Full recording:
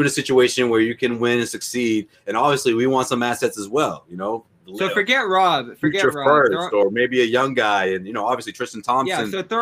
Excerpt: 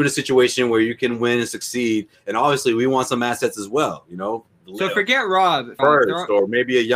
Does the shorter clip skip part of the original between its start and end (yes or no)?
yes